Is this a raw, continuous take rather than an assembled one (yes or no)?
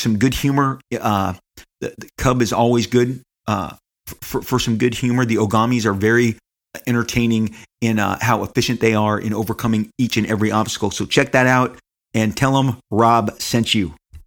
yes